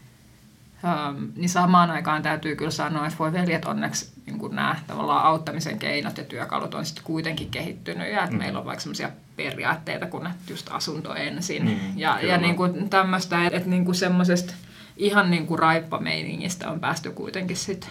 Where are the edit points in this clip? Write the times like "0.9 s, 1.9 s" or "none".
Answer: 13.5 s